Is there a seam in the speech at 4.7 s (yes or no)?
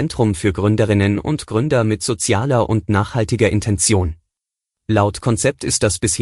yes